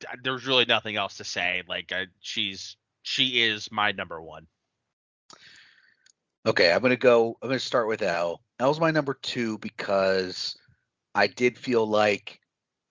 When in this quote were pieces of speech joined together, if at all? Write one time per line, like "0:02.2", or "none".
none